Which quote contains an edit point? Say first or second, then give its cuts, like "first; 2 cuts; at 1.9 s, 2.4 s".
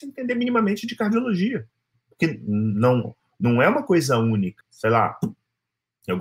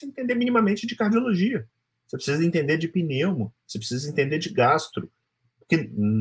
first; 2 cuts; at 1.9 s, 4.6 s